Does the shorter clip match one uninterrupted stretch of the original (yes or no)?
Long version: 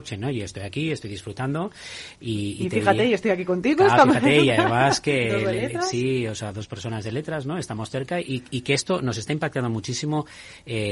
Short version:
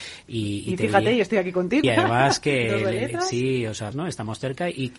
no